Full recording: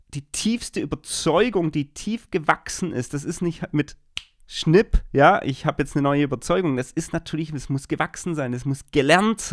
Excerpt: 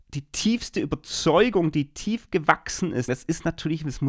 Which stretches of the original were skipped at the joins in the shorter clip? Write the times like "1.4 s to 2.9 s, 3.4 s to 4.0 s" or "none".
3.1 s to 6.8 s

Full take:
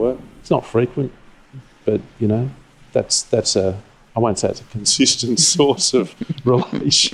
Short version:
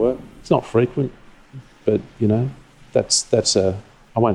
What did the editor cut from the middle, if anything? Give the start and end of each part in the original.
none

